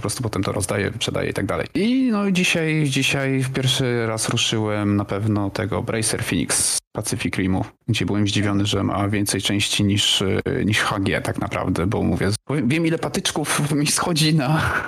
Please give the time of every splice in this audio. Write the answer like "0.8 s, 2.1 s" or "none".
none